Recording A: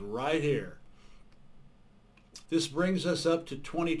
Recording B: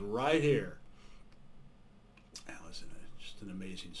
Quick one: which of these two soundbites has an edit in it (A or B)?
A